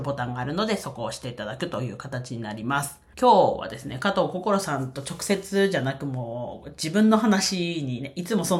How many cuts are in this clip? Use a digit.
1